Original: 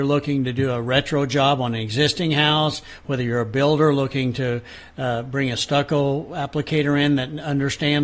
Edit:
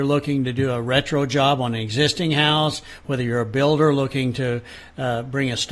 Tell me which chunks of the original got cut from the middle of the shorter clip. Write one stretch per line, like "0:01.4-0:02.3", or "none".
none

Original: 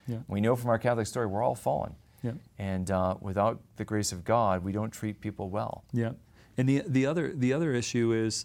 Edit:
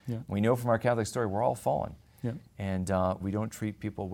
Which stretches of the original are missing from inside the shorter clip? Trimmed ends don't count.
0:03.2-0:04.6

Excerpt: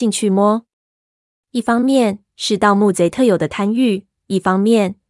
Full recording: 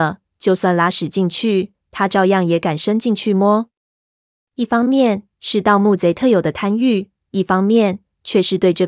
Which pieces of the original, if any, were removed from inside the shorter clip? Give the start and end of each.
none

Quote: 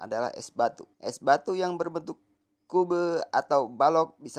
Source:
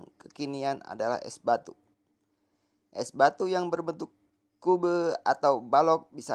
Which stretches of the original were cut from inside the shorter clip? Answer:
0:01.8-0:02.9

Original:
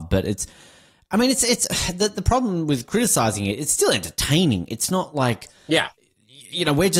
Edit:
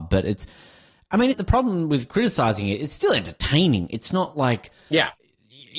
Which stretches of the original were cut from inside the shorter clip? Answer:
0:01.3-0:02.1

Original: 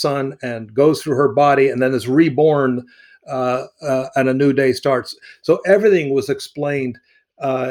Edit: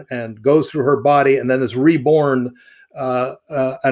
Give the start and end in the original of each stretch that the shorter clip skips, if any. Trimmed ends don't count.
none

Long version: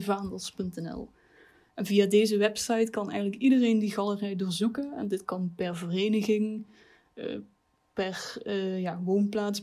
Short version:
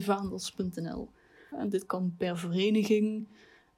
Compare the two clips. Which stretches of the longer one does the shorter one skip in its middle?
0:01.5-0:04.9

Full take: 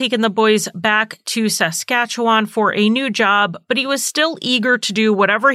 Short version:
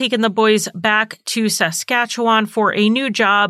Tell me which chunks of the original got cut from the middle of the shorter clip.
none

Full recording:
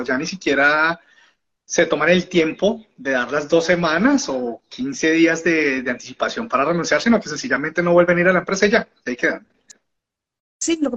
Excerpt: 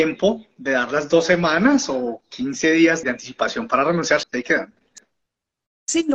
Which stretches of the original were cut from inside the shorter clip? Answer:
0:05.4-0:05.8
0:07.0-0:09.0

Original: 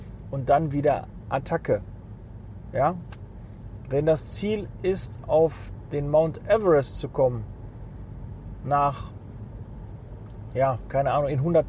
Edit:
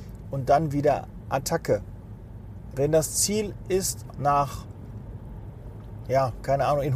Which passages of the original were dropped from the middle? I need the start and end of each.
0:02.7-0:03.9
0:05.3-0:08.6

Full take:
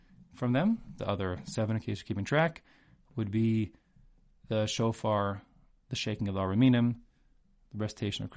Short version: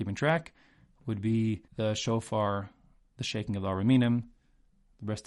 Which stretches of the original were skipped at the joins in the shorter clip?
0:03.8-0:04.4

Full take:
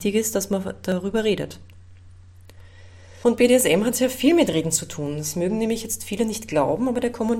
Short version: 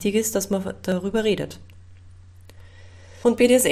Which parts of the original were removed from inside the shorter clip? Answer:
none

